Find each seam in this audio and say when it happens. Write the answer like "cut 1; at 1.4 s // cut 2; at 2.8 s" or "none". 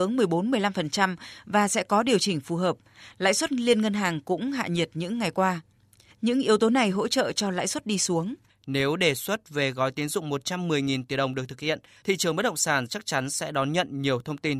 cut 1; at 8.5 s